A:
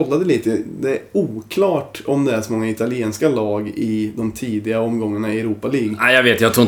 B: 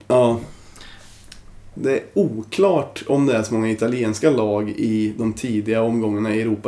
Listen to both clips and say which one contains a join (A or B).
B